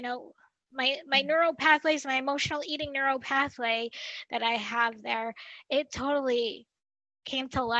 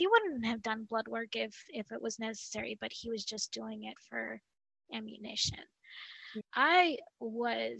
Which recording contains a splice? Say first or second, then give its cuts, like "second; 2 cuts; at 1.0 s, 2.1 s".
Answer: second; 1 cut; at 6.4 s